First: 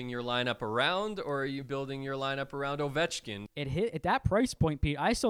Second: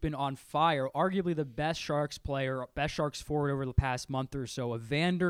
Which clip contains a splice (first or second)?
first